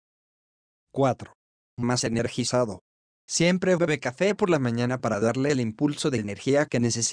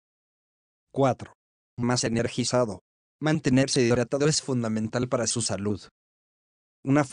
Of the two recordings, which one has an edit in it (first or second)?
second